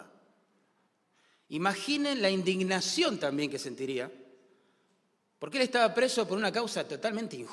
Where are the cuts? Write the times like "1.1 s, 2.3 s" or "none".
none